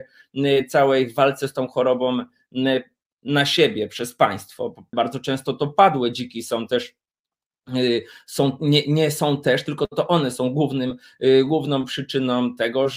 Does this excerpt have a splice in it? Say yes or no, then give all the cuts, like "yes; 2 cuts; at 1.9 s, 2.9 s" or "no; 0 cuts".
yes; 1 cut; at 4.9 s